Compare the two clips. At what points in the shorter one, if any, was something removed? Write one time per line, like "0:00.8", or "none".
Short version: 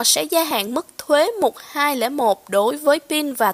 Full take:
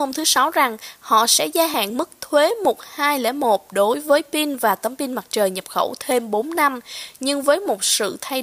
none

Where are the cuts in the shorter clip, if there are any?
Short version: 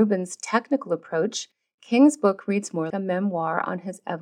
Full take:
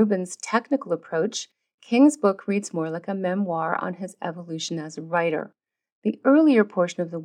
0:02.9

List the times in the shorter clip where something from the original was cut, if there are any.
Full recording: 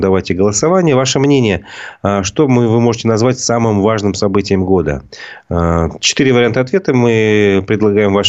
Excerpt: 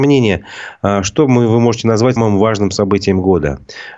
0:02.2

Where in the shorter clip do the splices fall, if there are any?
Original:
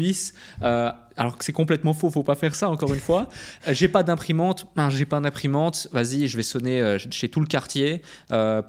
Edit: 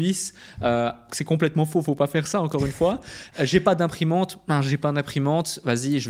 0:01.1

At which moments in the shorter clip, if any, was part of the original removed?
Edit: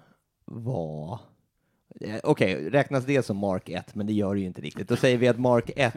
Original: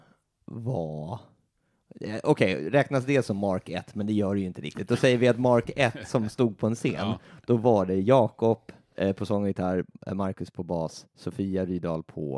none

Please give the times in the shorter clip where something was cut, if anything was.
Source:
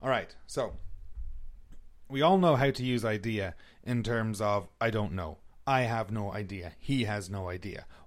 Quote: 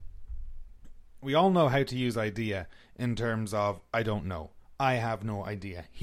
none

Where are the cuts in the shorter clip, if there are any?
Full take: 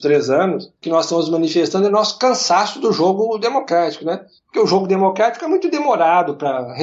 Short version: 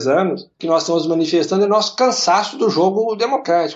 none

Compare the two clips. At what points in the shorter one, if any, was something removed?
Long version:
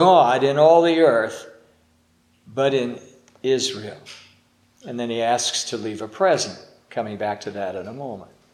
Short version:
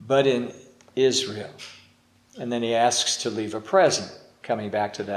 none

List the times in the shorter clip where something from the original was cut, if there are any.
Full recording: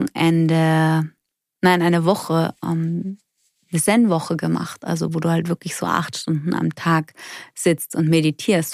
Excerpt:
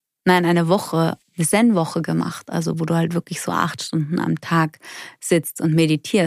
0:01.2

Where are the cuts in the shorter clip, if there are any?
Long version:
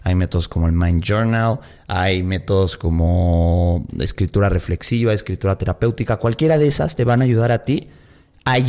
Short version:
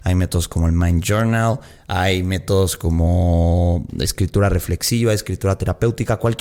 none

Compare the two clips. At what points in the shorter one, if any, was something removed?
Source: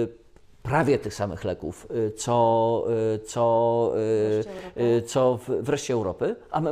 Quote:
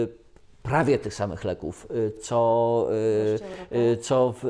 0:02.2

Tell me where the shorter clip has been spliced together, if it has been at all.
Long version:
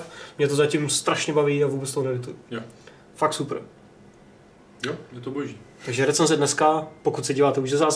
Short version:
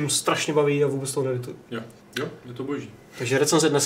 0:02.0

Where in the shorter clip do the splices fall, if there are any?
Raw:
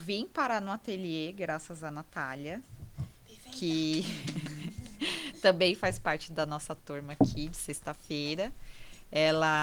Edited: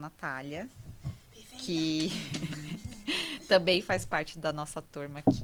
none

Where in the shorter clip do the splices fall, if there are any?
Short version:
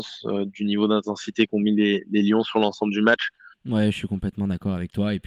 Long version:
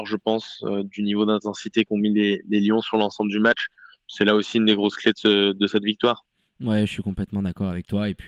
0:03.5

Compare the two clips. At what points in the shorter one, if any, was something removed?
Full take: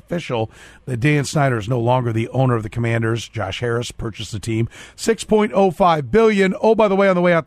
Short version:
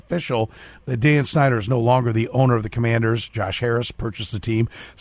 none

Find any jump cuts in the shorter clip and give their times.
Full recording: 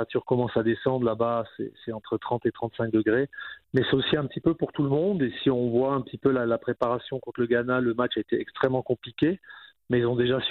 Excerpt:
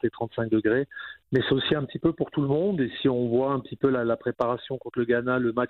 none

